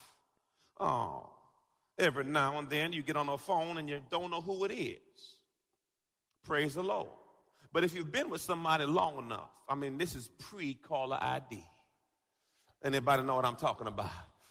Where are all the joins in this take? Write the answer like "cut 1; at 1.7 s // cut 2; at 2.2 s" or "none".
none